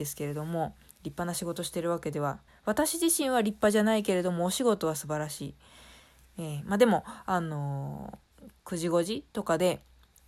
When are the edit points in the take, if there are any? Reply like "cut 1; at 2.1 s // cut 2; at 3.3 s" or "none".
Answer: cut 1; at 2.5 s